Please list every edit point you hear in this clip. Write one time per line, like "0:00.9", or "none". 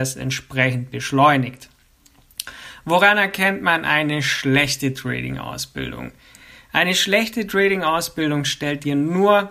none

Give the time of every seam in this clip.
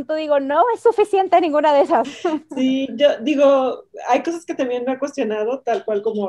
0:02.0

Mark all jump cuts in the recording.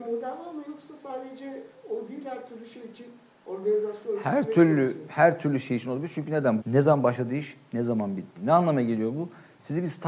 0:06.6
0:08.4

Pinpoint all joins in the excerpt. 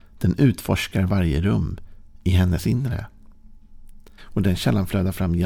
0:04.2

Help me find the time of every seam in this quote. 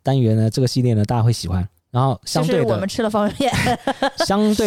0:01.8

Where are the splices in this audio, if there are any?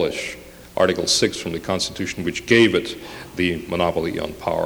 none

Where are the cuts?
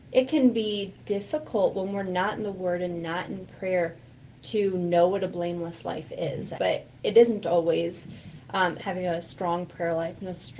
0:06.6
0:08.8

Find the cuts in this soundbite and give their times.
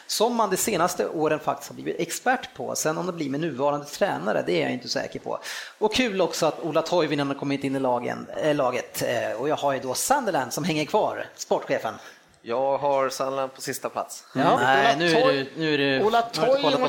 0:14.6

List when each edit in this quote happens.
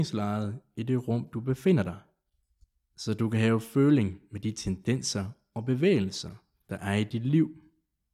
none

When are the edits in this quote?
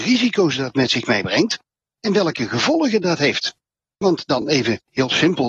none

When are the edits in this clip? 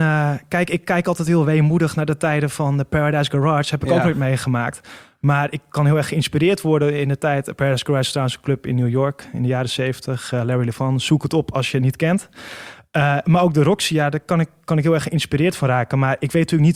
none

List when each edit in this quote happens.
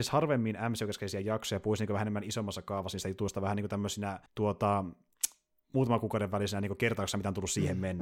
0:04.3

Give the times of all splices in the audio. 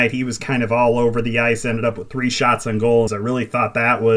0:03.1

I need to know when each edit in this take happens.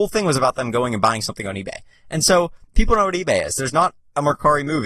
none

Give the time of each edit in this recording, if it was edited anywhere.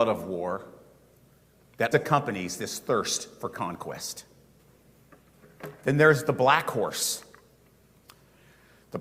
0:01.9

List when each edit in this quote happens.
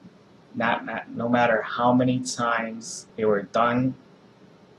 0:03.1

